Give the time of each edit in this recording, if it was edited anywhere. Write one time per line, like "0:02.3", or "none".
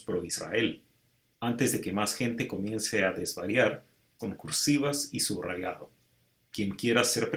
0:01.3
0:04.2